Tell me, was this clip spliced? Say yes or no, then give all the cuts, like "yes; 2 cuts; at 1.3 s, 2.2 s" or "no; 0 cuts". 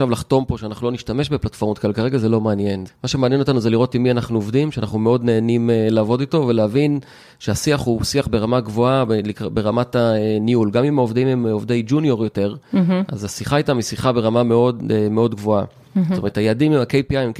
no; 0 cuts